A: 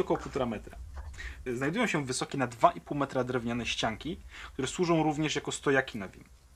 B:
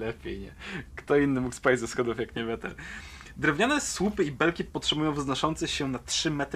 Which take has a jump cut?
A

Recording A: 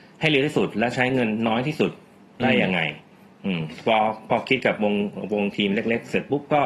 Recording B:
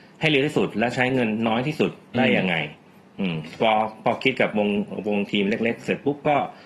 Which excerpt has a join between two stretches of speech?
B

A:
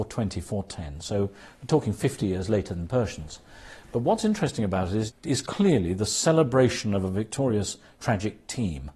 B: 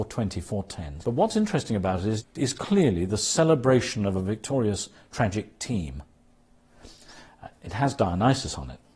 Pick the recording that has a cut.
B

